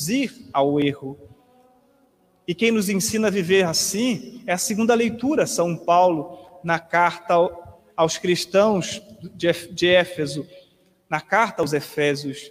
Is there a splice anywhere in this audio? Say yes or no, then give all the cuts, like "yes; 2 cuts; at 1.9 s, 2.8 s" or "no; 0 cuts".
no; 0 cuts